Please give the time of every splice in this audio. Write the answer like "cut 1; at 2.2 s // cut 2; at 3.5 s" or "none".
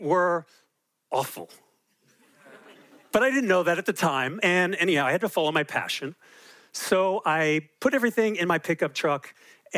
none